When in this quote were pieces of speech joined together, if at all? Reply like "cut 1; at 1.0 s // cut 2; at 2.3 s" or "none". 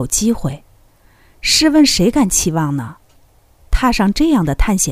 none